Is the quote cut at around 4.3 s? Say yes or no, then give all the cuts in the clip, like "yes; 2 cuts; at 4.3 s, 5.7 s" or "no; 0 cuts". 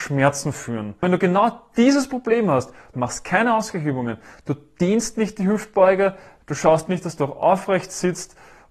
no; 2 cuts; at 2.9 s, 6.4 s